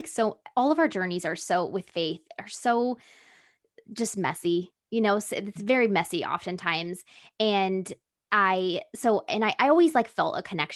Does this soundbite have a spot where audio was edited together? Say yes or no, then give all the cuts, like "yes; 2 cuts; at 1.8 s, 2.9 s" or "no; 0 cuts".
no; 0 cuts